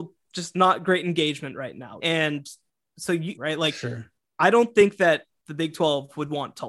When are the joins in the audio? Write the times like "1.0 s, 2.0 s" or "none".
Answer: 2.0 s, 3.4 s